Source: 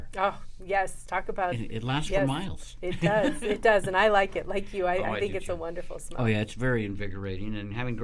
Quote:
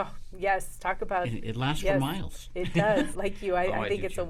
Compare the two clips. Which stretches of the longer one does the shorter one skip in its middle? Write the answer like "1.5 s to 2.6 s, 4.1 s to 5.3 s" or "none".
3.4 s to 4.4 s